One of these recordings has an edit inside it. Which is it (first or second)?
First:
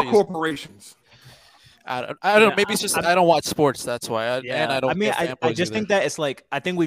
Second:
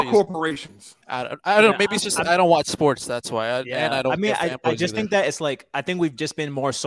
second